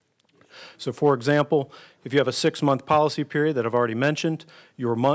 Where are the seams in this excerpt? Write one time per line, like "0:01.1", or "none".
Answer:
none